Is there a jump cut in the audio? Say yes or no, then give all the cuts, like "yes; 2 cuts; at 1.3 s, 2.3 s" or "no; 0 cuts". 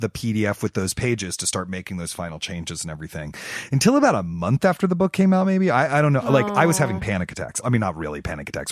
no; 0 cuts